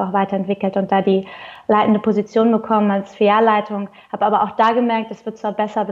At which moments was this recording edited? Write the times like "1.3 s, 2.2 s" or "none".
none